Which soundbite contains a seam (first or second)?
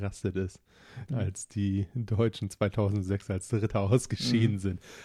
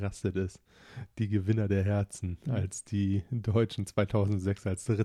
first